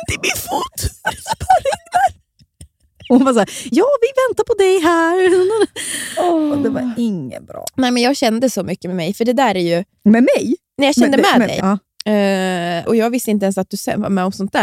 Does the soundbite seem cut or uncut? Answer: cut